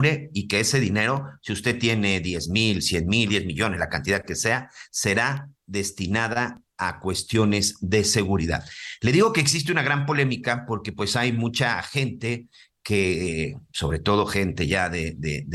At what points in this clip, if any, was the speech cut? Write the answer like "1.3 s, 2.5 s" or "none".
3.3 s